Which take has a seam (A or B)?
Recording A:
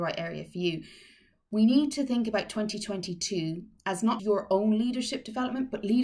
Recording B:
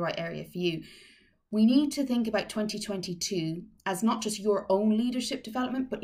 A